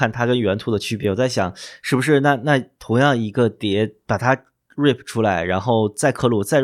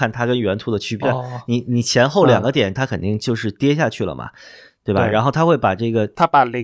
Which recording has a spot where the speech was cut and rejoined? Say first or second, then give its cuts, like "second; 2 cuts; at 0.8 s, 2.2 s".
second; 2 cuts; at 1.0 s, 2.7 s